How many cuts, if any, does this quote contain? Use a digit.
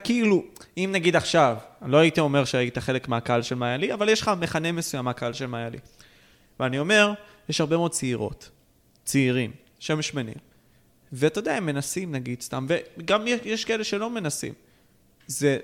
0